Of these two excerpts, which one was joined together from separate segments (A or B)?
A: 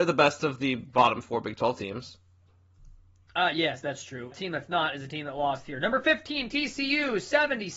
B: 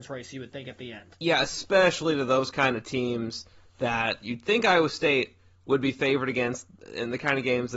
A